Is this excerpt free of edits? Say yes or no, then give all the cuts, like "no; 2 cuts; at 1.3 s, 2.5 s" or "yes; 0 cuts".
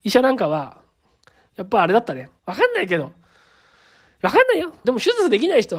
no; 2 cuts; at 2.4 s, 4.8 s